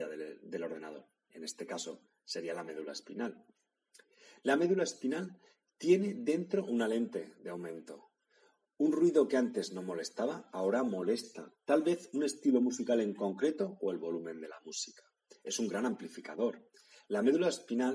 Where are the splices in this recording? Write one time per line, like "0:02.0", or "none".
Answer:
none